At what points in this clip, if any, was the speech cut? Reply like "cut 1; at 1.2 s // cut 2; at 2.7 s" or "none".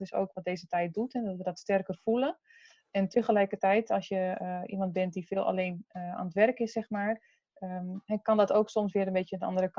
none